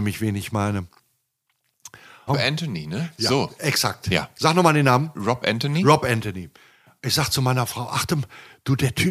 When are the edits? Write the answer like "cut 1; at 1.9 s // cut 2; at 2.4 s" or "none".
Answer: cut 1; at 2.3 s